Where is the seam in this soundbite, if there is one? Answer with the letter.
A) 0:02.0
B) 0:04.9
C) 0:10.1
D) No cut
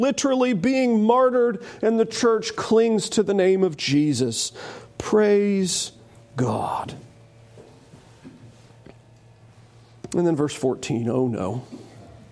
D